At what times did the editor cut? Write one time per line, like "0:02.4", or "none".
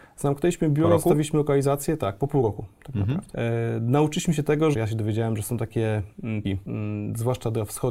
0:04.7
0:06.4